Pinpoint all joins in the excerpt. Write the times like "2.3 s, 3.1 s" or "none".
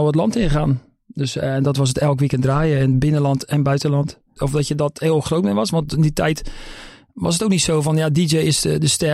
4.4 s